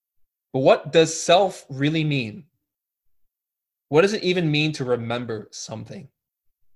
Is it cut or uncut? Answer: uncut